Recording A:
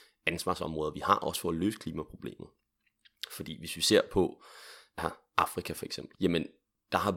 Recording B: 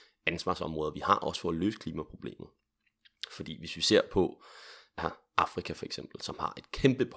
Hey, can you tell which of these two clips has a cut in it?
A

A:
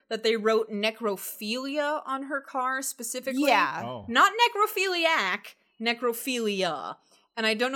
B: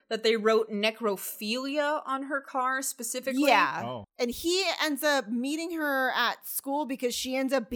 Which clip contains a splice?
B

